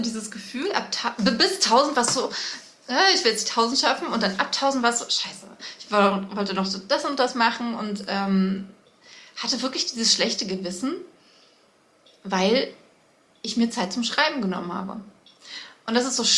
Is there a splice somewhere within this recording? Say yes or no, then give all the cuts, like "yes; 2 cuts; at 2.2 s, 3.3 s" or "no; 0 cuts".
no; 0 cuts